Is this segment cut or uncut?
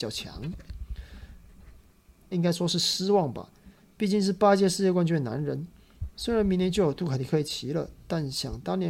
cut